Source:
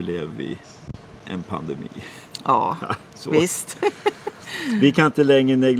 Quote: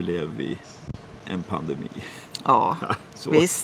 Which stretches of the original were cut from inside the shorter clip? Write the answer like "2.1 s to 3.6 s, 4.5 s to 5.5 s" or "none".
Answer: none